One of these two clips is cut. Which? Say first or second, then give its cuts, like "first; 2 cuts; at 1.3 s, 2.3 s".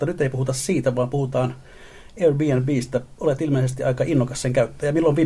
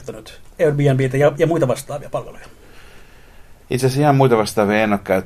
second; 1 cut; at 3.6 s